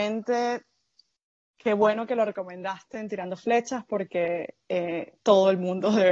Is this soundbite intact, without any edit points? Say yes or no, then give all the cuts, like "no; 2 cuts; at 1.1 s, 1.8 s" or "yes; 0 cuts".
yes; 0 cuts